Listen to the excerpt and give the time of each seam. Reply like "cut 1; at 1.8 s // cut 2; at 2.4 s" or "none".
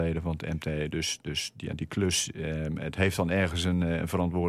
none